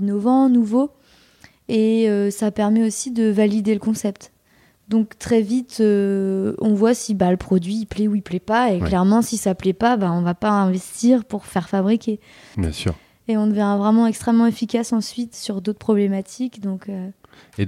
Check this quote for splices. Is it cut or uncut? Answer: cut